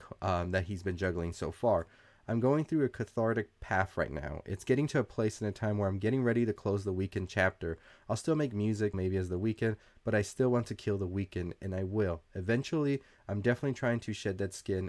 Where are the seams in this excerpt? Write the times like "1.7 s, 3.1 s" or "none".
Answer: 8.9 s